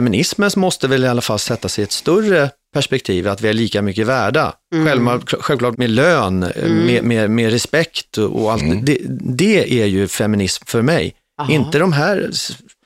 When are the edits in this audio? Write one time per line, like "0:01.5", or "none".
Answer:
0:05.7